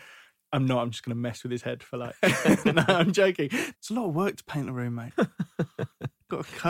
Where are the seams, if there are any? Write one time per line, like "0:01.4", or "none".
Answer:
0:03.7

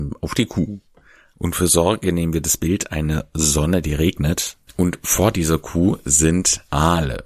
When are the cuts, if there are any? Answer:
0:01.3
0:04.7

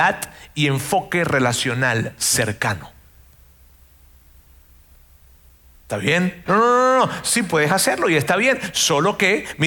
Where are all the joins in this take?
0:06.5

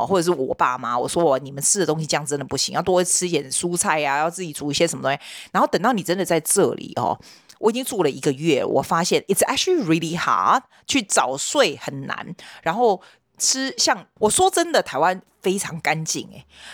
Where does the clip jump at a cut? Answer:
0:14.2

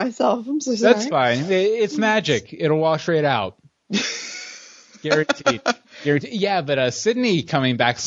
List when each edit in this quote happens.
none

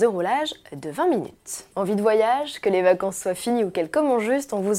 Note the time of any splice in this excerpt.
0:01.7

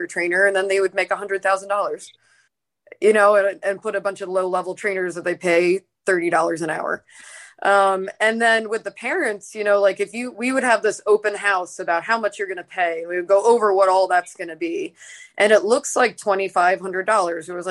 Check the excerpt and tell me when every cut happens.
none

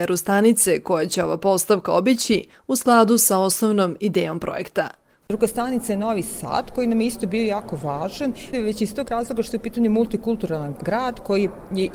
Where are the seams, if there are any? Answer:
0:05.2
0:08.5

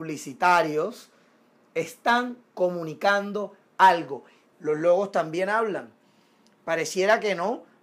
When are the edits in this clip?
0:04.5

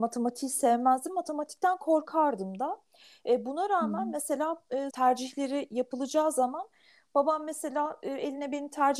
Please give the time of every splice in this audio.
0:04.9

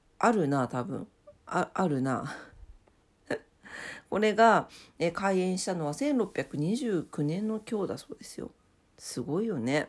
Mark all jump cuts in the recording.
0:03.5

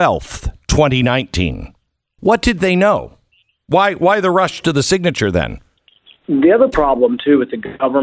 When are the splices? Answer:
0:02.2

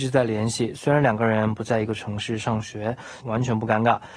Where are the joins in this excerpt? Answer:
0:03.2

